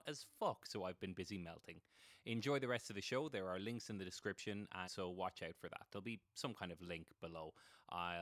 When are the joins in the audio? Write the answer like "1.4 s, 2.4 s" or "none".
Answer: 4.8 s